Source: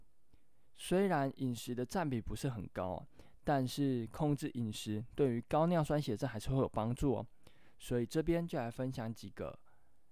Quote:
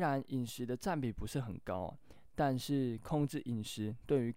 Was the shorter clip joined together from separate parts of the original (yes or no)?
no